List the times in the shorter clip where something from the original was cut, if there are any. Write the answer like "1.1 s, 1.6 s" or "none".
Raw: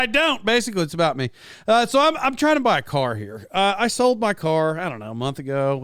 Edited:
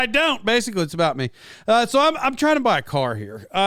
none